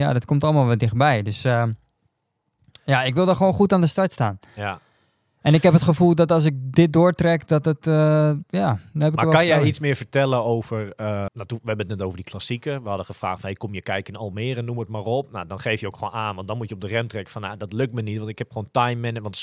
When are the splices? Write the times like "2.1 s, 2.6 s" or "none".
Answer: 11.3 s